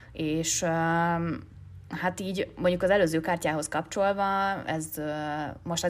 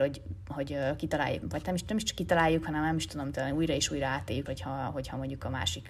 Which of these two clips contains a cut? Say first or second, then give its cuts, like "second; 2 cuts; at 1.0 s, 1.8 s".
second; 2 cuts; at 1.4 s, 4.5 s